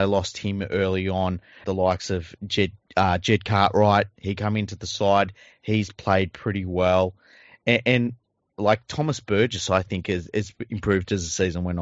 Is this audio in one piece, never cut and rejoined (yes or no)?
no